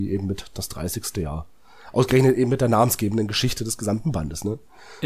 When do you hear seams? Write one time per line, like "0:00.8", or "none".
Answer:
none